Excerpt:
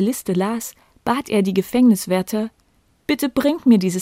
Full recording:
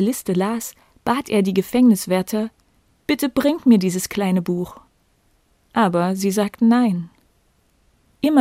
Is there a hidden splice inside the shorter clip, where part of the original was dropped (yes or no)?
no